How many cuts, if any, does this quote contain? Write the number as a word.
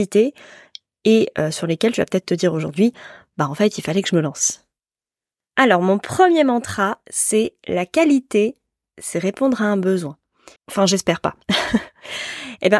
one